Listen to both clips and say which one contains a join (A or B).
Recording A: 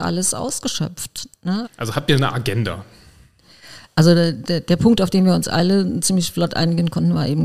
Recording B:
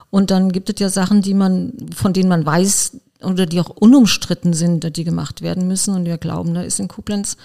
A